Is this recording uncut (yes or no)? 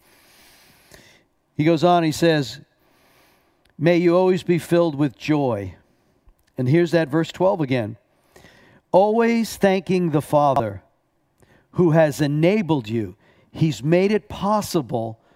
yes